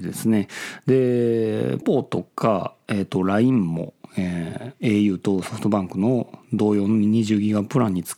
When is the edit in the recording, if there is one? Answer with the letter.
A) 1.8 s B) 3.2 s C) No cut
A